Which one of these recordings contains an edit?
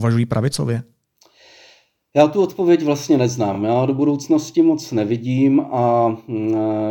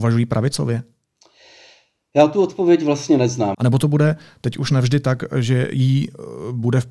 second; 1 cut; at 3.5 s

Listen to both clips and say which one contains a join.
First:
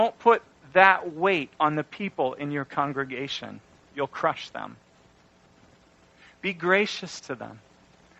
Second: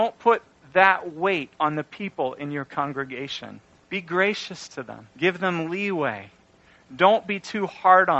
second; 2 cuts; at 3.8 s, 5.1 s

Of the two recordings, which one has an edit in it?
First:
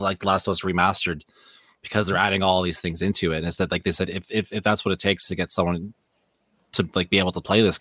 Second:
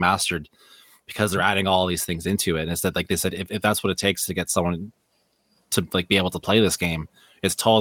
second; 1 cut; at 3.5 s

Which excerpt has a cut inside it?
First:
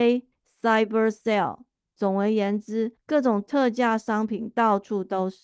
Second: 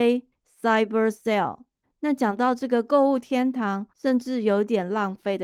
second; 2 cuts; at 1.8 s, 3.9 s

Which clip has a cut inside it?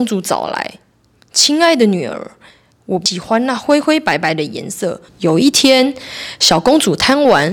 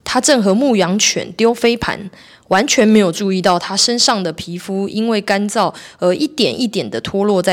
first; 1 cut; at 5.1 s

